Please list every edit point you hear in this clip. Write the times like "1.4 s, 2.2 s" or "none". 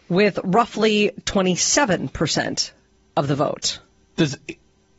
none